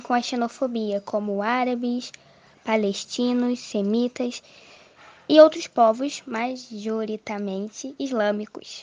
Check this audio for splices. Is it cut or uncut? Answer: uncut